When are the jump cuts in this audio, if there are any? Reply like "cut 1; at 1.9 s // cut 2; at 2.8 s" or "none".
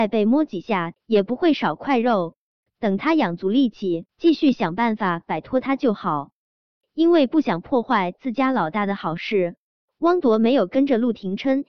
cut 1; at 0.9 s // cut 2; at 4.1 s